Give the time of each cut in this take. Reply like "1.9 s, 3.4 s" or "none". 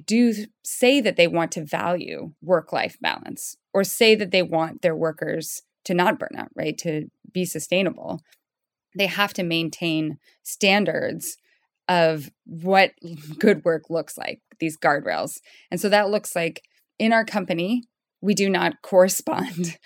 none